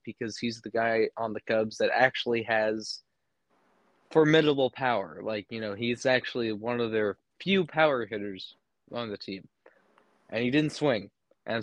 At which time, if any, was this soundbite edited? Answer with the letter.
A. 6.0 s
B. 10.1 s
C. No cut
C